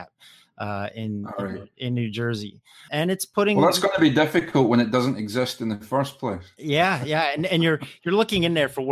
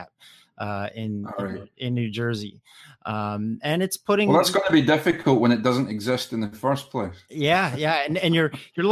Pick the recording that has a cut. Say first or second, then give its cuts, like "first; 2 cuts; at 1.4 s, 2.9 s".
first; 1 cut; at 2.9 s